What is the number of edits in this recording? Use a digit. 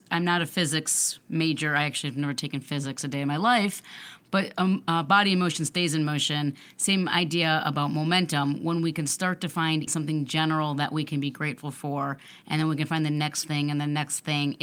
1